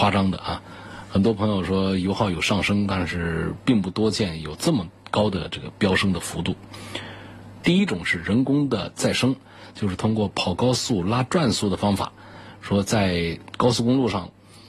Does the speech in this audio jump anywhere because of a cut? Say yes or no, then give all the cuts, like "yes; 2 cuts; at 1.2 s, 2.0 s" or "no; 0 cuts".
yes; 1 cut; at 7.6 s